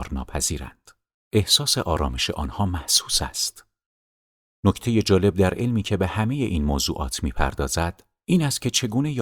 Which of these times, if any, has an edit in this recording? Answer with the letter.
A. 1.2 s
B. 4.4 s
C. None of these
A